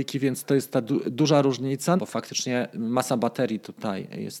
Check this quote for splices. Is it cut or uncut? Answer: cut